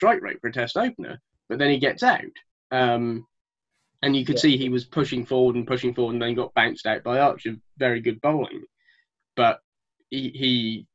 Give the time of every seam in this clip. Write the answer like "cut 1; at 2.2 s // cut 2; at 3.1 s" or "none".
none